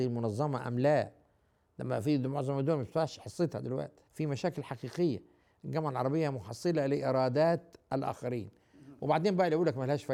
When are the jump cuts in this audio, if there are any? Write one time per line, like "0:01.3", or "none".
0:04.1